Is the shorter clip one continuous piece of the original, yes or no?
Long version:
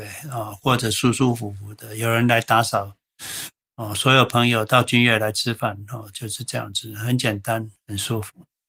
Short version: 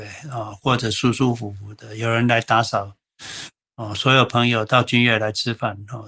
yes